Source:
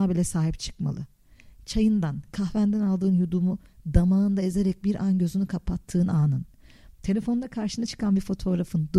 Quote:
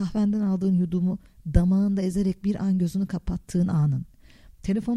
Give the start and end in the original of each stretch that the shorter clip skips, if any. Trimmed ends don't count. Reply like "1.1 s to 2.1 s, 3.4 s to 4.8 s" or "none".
none